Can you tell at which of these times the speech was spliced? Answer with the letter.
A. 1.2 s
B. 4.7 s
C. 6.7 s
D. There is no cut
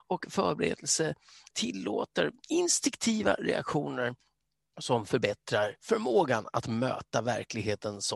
D